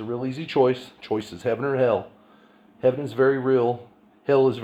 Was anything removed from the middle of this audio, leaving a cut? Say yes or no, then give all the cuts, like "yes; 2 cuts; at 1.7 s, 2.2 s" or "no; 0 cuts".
no; 0 cuts